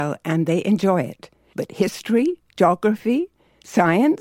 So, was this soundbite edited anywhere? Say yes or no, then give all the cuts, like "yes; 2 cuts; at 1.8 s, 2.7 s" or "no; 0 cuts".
yes; 1 cut; at 1.5 s